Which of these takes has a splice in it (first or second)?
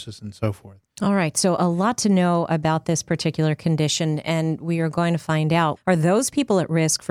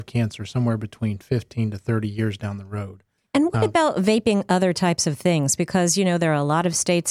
first